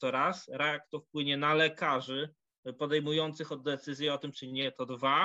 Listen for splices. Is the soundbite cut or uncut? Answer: cut